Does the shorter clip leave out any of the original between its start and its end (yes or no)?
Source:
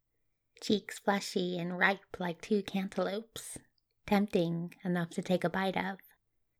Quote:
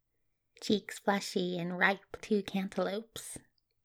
yes